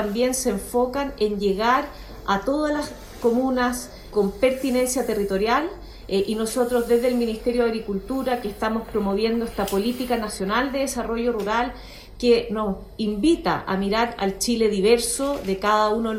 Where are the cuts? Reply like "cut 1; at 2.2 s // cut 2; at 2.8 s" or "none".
cut 1; at 4.1 s